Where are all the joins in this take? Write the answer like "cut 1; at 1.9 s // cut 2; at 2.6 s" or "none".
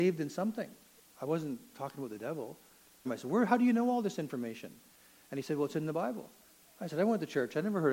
cut 1; at 1.0 s // cut 2; at 3.1 s